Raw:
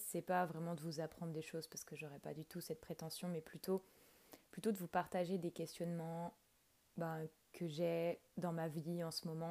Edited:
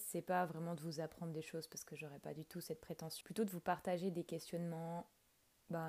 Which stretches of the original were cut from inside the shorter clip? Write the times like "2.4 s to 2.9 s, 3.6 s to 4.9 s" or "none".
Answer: 3.2 s to 4.5 s

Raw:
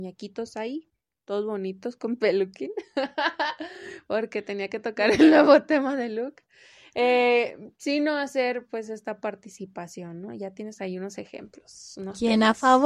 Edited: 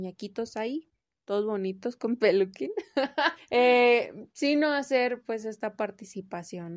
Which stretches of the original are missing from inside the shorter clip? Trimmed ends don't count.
3.4 s to 6.8 s

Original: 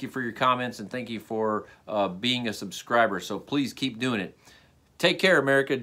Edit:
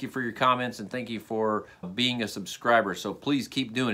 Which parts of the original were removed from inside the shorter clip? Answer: 1.8 s to 2.1 s

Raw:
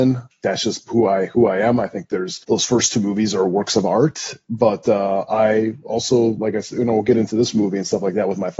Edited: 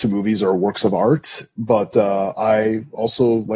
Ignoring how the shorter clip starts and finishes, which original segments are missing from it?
none

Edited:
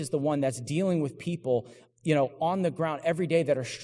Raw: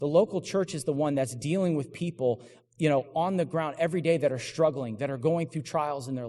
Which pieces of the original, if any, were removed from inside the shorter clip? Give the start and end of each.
none

